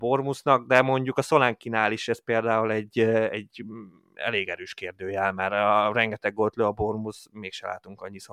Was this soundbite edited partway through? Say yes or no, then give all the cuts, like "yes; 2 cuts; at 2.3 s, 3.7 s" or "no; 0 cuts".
no; 0 cuts